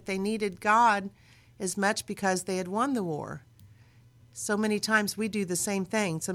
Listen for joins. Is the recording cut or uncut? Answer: uncut